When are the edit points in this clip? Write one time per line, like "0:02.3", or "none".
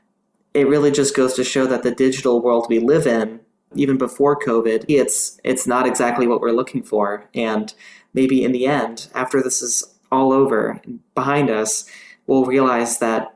0:04.9